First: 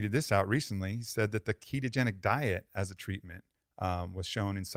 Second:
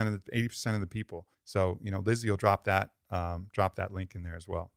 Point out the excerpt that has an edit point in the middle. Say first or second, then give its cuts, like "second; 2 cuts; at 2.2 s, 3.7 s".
second; 1 cut; at 1.3 s